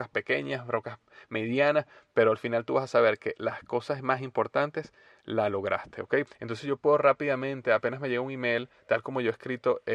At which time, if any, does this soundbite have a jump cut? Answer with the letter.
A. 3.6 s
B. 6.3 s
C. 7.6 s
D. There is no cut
B